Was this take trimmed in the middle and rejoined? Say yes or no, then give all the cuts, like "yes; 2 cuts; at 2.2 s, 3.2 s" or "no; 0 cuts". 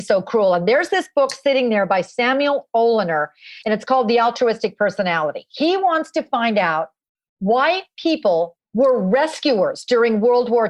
yes; 1 cut; at 8.7 s